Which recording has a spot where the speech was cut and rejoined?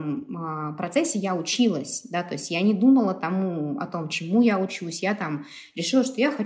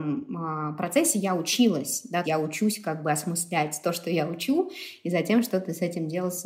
second; 1 cut; at 2.2 s

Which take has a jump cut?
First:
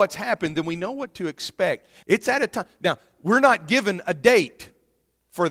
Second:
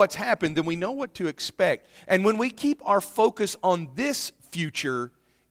first; 1 cut; at 2.0 s

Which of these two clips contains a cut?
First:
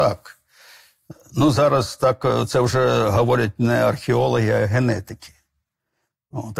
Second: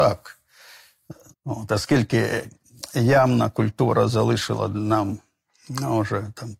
second; 1 cut; at 1.3 s

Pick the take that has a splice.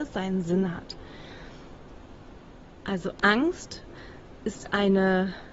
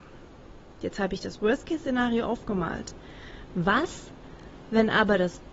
first; 1 cut; at 2.8 s

